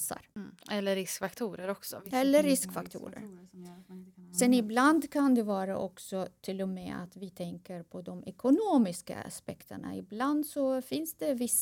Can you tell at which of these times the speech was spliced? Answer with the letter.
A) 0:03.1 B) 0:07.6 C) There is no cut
C